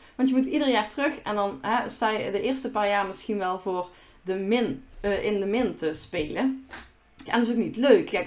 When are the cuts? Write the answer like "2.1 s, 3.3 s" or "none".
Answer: 7.3 s